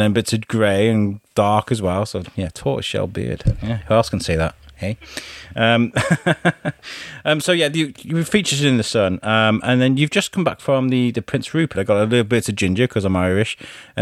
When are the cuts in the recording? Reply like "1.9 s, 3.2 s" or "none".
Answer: 11.7 s